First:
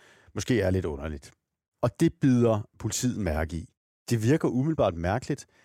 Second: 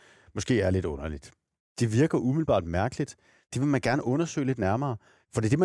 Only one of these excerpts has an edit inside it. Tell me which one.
second; 1 cut; at 1.6 s

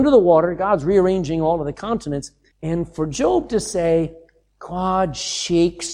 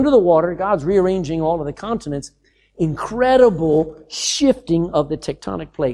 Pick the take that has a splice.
first; 1 cut; at 2.5 s

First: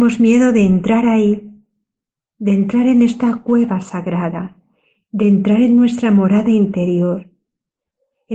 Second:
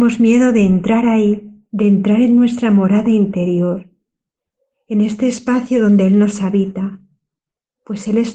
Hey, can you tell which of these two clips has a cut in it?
second; 1 cut; at 1.7 s

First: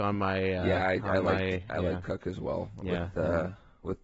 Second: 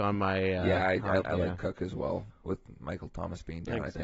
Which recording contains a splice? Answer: second; 2 cuts; at 1.2 s, 2.3 s

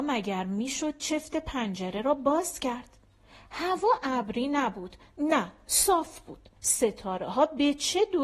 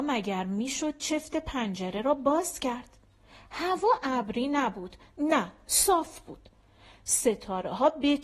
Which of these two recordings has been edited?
first; 1 cut; at 6.6 s

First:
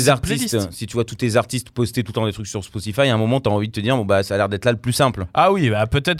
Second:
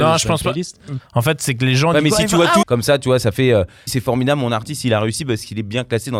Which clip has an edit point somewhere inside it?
second; 3 cuts; at 1.0 s, 2.6 s, 3.9 s

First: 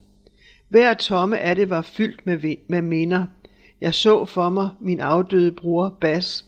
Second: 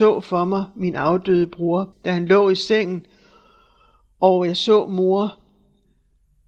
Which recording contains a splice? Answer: second; 1 cut; at 1.9 s

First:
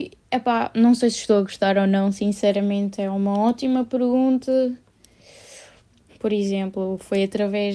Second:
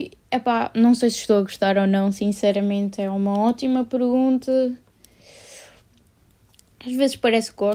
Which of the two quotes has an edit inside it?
first; 1 cut; at 6.1 s

